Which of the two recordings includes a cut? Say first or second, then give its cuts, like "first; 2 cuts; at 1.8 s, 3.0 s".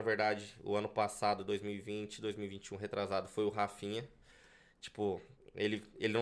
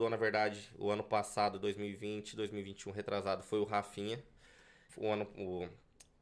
second; 1 cut; at 4.9 s